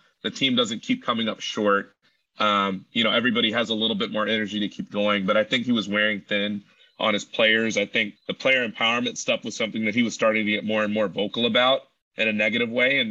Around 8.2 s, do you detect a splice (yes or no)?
yes